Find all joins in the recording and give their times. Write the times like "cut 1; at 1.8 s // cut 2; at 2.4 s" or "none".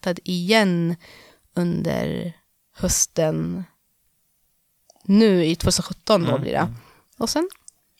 none